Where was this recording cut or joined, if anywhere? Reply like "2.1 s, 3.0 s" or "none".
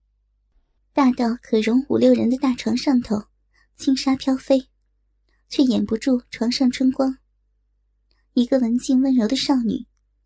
none

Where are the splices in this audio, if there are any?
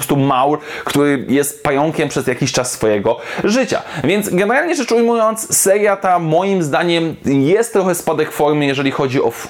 none

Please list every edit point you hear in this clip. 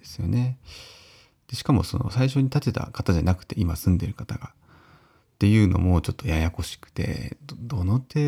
none

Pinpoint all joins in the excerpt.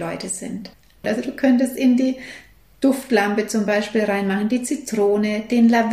1.0 s

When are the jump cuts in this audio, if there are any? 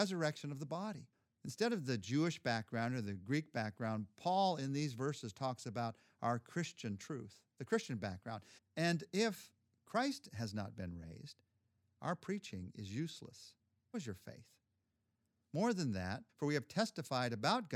8.6 s, 13.9 s, 16.3 s

